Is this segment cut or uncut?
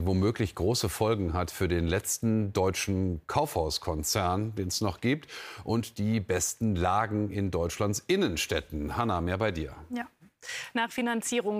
uncut